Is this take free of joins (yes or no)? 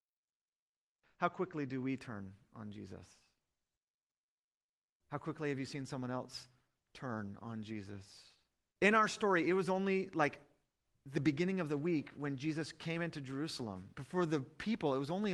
no